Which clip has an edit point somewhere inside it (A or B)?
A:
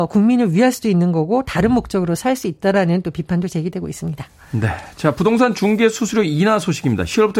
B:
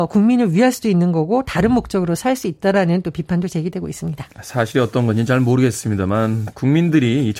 B